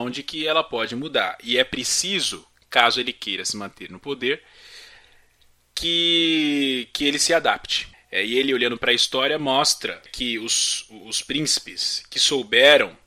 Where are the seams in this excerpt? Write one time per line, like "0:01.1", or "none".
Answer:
0:07.9
0:10.1